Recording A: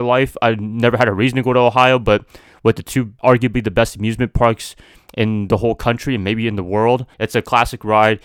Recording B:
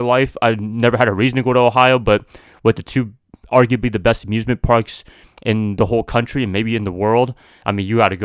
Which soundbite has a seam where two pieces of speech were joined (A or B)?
A